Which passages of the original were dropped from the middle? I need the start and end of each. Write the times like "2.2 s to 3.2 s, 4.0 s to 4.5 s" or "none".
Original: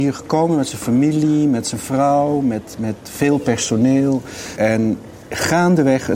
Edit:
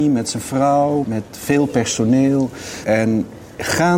2.4 s to 2.8 s

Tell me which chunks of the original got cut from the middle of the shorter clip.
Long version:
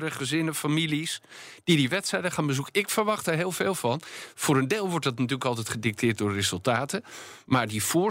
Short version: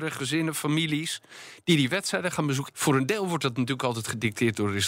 2.7 s to 4.3 s

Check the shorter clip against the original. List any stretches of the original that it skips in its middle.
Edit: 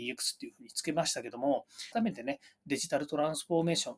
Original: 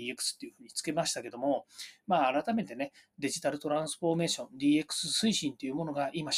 1.9 s to 2.4 s

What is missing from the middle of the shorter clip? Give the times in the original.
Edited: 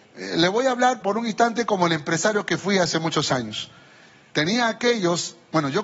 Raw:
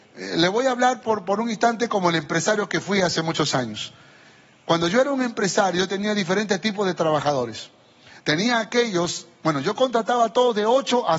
1.0 s to 1.2 s, 4.5 s to 8.2 s

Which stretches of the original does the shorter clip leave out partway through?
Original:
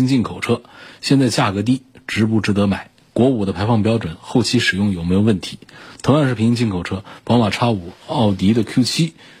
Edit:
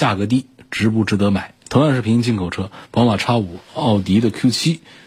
3.0 s to 6.0 s

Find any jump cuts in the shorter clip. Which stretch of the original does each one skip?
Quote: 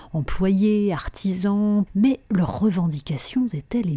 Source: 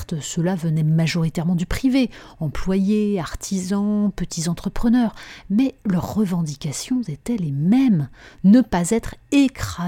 4.1 s to 5.4 s

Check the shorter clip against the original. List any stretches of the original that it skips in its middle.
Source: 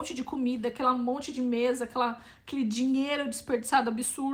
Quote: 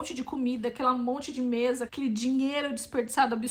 1.9 s to 2.4 s

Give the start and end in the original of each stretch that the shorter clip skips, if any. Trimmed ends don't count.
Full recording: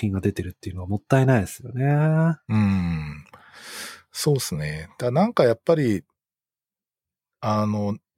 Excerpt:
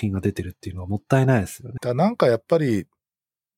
1.8 s to 4.9 s

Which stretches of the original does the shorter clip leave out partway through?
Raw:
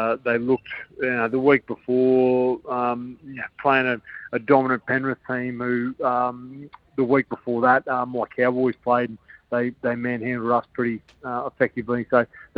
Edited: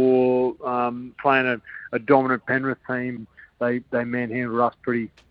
3.2 s to 3.5 s, 5.6 s to 9.1 s

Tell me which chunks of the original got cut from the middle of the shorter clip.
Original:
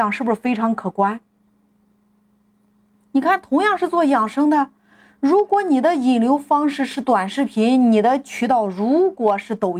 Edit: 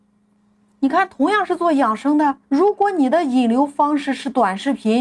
4.7 s to 5.1 s

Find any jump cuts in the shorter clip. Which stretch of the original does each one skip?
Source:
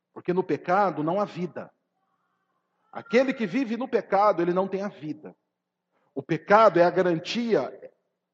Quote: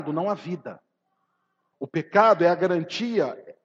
2.6 s to 6.1 s

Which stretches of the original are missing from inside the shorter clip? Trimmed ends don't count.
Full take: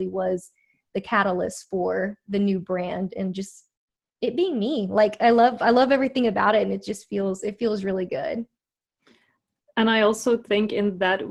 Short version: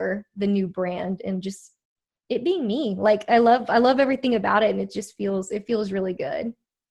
none

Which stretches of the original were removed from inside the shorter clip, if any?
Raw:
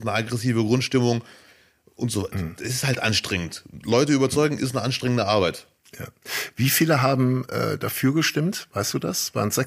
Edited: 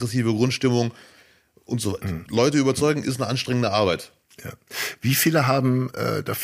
2.6 s to 3.8 s

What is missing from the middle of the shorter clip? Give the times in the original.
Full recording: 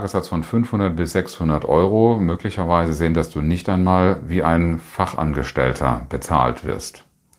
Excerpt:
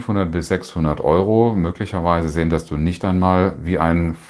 none

